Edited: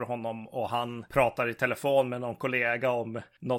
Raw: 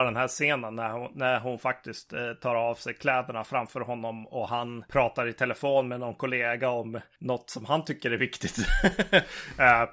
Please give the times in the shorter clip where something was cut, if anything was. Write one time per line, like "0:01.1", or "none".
none